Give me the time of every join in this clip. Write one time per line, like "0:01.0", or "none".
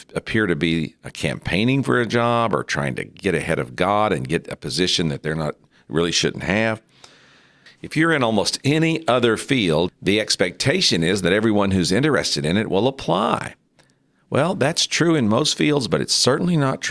0:07.7
0:09.9